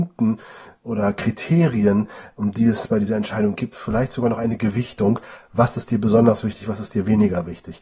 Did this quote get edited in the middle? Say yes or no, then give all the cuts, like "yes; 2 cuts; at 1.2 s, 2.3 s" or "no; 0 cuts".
no; 0 cuts